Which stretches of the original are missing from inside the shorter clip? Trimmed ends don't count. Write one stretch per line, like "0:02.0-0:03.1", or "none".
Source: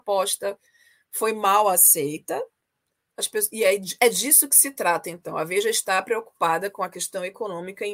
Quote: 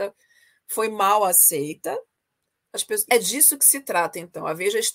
0:03.5-0:04.0